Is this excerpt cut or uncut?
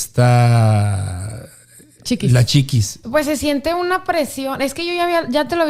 cut